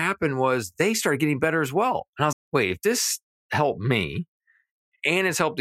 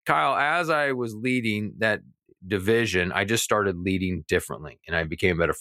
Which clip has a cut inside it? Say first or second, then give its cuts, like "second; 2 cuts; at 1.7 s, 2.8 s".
first; 1 cut; at 2.3 s